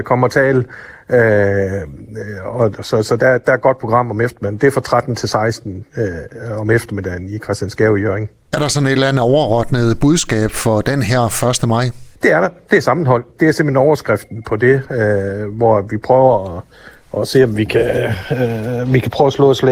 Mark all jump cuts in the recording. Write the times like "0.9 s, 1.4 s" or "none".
none